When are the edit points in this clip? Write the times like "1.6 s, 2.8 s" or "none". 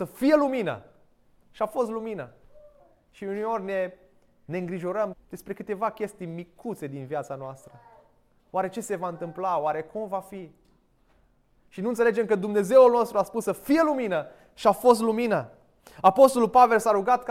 5.1 s